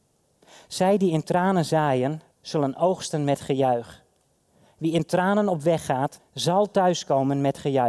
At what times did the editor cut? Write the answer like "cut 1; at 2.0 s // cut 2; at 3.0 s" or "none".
cut 1; at 2.3 s // cut 2; at 6.2 s